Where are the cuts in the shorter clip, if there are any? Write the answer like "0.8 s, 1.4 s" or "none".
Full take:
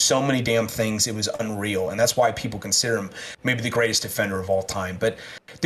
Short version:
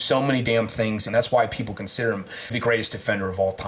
1.1 s, 2.5 s